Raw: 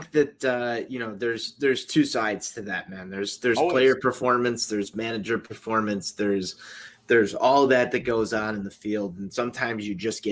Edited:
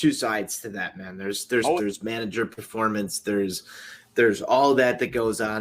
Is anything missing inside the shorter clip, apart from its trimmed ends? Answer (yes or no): yes